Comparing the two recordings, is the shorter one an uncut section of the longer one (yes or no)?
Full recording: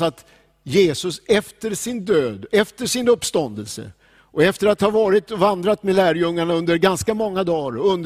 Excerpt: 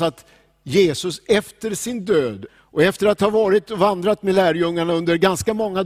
no